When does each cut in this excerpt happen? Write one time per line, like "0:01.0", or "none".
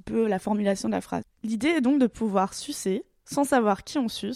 0:01.2